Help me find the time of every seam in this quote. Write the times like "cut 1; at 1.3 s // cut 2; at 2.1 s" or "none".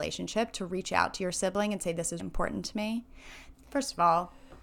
cut 1; at 2.2 s // cut 2; at 3.5 s

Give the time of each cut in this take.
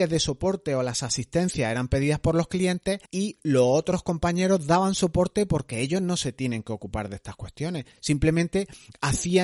cut 1; at 3.1 s

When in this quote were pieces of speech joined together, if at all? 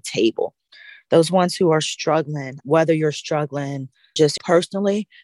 none

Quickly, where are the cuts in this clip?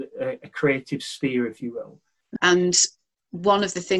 cut 1; at 2.4 s

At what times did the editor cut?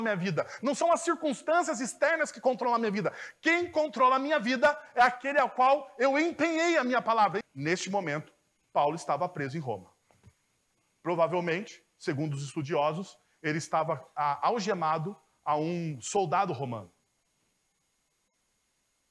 cut 1; at 7.4 s

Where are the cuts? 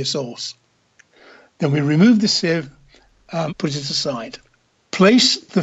cut 1; at 3.5 s

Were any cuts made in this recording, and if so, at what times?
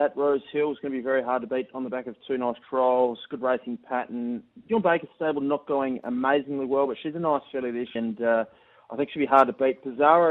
cut 1; at 8.0 s

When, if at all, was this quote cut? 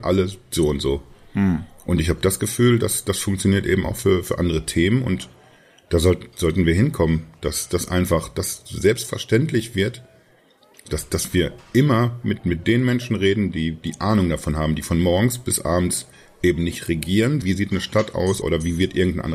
cut 1; at 17.4 s // cut 2; at 18.4 s

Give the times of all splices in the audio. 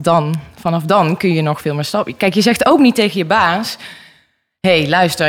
none

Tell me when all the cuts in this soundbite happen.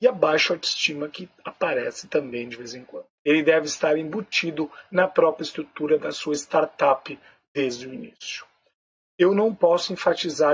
cut 1; at 3.2 s // cut 2; at 9.1 s

